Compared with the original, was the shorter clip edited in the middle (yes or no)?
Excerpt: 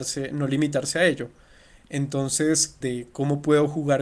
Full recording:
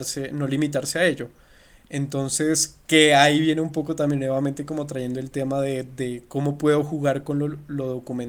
yes